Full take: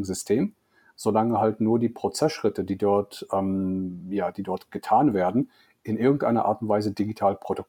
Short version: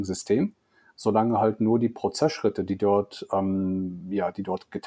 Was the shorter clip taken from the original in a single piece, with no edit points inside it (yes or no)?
yes